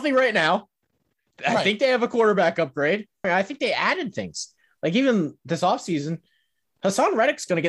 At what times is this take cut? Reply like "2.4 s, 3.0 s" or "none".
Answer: 3.2 s, 5.4 s